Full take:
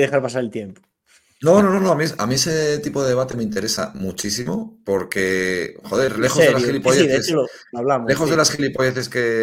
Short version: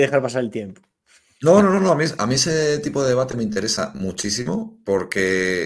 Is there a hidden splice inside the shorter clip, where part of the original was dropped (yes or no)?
no